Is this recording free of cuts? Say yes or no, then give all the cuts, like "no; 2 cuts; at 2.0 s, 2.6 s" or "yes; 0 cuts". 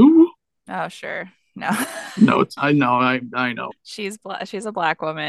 no; 2 cuts; at 2.6 s, 3.7 s